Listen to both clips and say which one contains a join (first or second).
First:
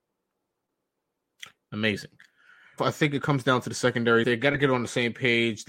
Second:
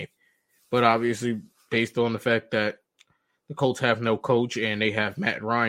first